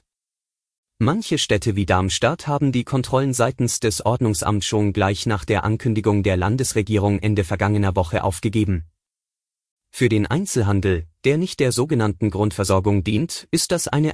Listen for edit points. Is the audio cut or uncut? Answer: uncut